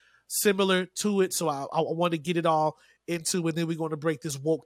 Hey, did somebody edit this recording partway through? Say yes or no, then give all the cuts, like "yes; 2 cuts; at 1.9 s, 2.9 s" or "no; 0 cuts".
no; 0 cuts